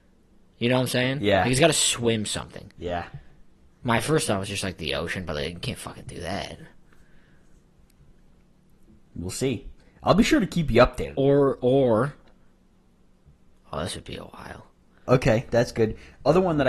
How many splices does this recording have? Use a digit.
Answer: 2